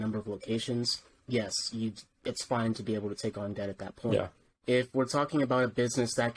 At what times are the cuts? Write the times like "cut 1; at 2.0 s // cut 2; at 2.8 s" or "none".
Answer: cut 1; at 4.4 s

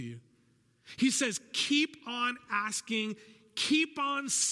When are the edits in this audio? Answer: none

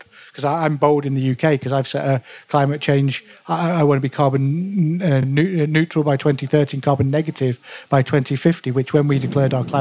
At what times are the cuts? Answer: none

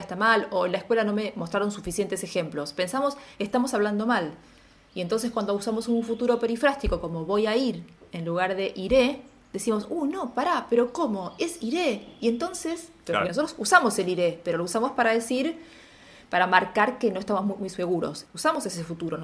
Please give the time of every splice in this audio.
cut 1; at 18.3 s

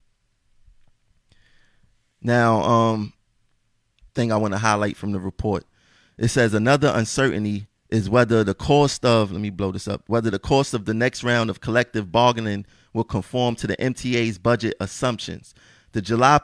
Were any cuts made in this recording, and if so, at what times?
cut 1; at 4.1 s // cut 2; at 7.8 s

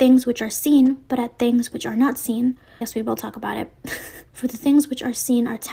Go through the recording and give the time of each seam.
cut 1; at 2.8 s // cut 2; at 4.3 s

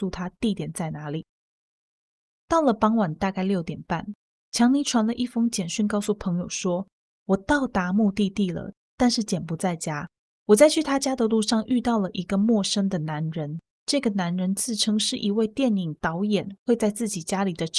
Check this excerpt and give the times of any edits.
none

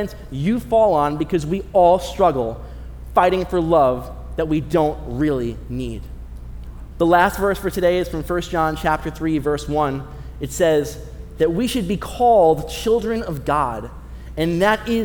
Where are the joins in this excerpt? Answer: cut 1; at 6.9 s // cut 2; at 11.4 s

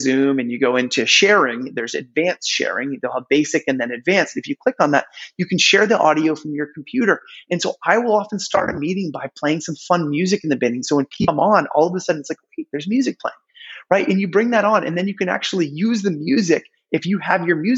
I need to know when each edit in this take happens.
none

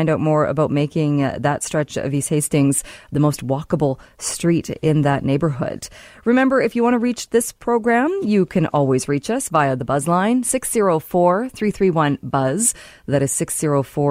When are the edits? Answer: none

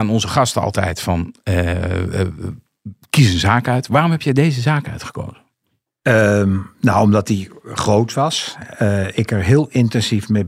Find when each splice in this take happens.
none

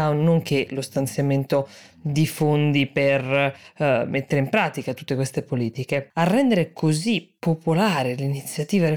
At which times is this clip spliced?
cut 1; at 6.1 s

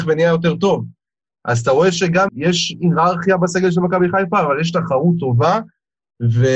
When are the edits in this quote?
cut 1; at 2.3 s

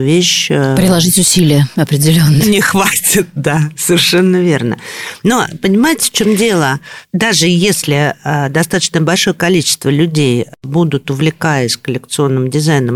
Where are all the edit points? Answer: cut 1; at 2.4 s

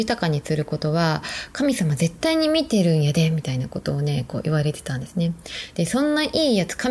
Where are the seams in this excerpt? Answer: none

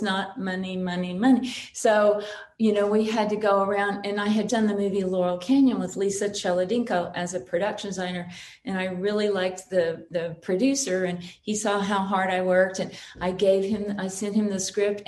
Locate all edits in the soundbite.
cut 1; at 4.5 s

